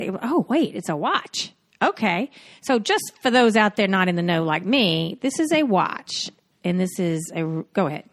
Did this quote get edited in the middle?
no; 0 cuts

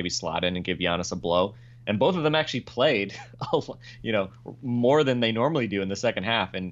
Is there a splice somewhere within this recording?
no; 0 cuts

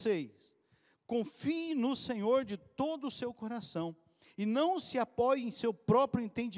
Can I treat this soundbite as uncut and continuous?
yes; 0 cuts

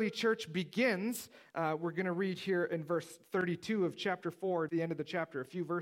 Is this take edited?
yes; 1 cut; at 4.7 s

